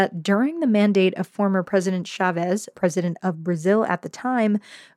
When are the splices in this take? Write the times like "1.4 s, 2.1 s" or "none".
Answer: 2.7 s